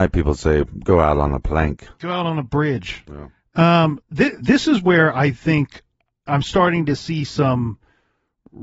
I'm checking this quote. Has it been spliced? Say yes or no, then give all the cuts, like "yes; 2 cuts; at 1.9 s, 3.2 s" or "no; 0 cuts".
yes; 2 cuts; at 4.0 s, 6.3 s